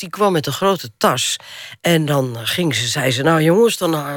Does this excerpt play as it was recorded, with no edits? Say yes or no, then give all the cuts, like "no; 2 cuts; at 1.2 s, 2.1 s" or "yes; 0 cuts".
no; 1 cut; at 1.8 s